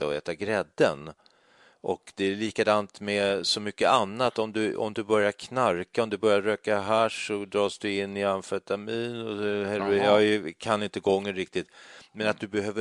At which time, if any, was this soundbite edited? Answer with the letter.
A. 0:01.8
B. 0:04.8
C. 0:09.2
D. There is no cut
D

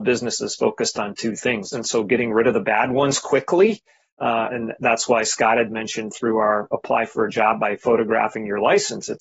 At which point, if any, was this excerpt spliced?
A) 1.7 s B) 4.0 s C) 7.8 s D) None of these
A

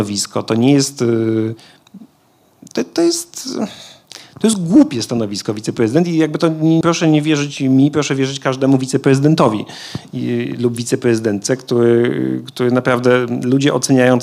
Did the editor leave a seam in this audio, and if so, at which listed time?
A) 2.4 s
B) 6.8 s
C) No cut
B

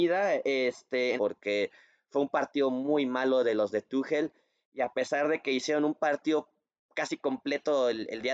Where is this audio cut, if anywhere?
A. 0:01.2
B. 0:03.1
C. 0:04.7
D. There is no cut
A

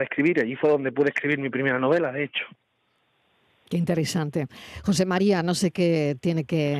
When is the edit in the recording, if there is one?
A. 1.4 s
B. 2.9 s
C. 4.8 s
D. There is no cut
D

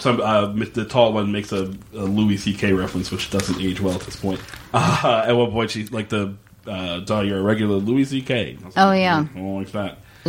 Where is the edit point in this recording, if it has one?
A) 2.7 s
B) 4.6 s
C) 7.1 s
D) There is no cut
C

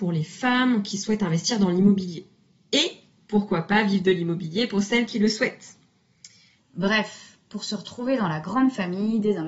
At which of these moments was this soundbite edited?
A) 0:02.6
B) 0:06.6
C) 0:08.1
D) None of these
B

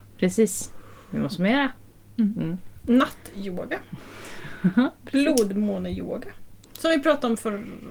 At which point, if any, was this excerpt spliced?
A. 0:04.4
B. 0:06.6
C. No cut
B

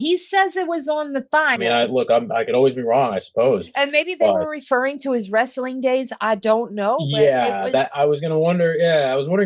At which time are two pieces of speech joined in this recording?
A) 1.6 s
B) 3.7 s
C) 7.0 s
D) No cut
A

